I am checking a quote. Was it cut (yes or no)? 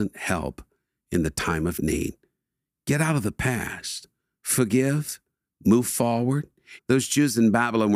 yes